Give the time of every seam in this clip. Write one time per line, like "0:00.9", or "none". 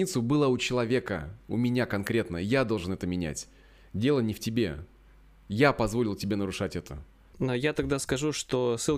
0:07.3

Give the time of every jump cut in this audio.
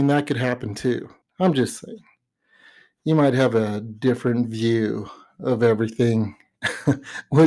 0:01.2

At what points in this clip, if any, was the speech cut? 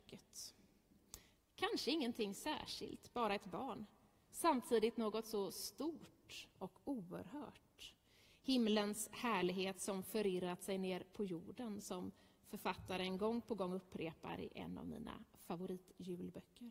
none

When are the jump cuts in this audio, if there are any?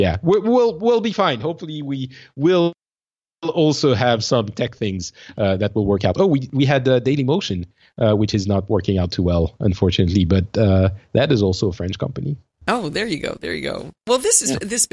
none

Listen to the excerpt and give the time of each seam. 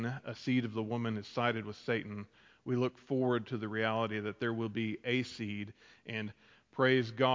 none

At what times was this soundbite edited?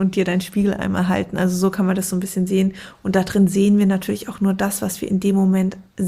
none

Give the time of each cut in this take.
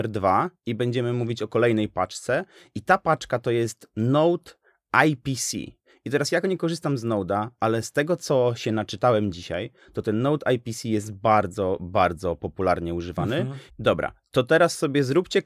0:13.7

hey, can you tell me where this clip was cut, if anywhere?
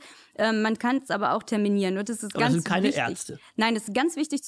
none

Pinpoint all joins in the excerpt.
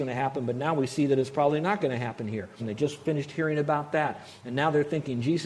0:02.6

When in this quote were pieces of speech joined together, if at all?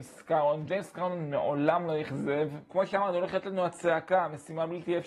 0:02.7

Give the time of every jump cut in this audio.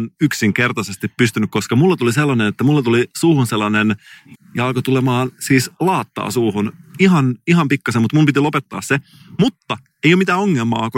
0:04.3

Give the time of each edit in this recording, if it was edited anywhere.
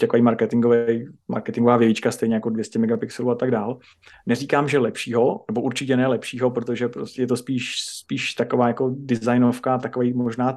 0:04.1

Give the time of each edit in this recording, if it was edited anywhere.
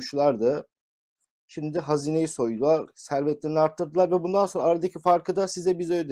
none

